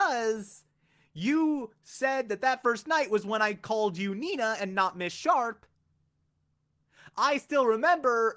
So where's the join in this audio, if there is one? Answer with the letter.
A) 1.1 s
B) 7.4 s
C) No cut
C